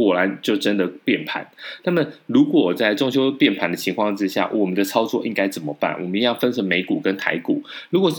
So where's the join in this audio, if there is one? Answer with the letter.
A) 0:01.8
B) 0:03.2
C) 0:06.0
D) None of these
D